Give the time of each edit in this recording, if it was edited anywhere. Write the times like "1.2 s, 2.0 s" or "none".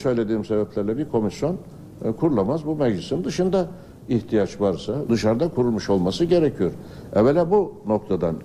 5.0 s